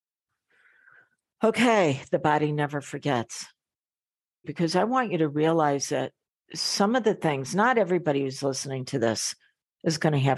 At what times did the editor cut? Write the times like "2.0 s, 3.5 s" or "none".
4.4 s